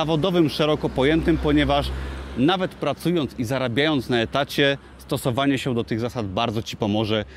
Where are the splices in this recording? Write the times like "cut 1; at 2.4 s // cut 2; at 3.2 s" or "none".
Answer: none